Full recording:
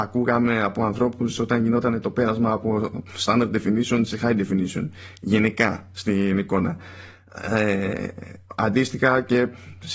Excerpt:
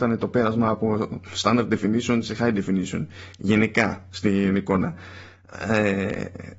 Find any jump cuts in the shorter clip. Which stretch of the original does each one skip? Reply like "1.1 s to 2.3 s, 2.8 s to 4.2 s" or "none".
none